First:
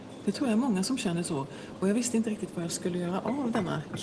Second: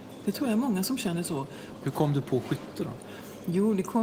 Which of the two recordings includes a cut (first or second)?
second